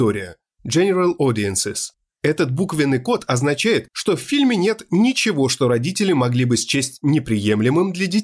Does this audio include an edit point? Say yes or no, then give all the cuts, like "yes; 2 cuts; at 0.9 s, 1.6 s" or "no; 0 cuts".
no; 0 cuts